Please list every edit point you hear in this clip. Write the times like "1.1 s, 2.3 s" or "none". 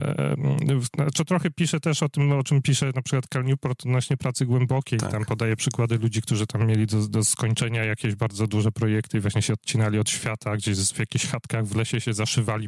none